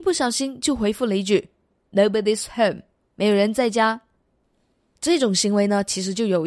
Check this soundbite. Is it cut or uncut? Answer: uncut